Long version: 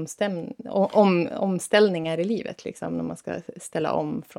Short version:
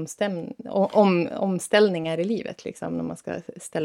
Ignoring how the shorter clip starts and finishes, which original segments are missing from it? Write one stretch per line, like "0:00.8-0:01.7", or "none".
none